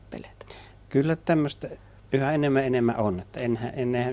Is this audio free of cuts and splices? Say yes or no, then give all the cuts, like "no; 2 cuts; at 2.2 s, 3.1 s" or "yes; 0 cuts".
yes; 0 cuts